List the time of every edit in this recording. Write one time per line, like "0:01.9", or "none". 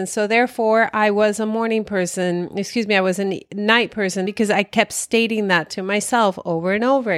0:04.3